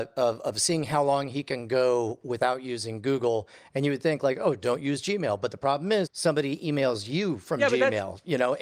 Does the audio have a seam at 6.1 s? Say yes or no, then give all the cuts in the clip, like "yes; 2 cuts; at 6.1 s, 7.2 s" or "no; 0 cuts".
yes; 1 cut; at 6.1 s